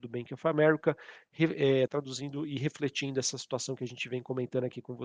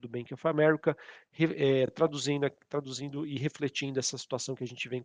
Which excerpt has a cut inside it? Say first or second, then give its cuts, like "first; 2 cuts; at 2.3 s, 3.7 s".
first; 1 cut; at 1.9 s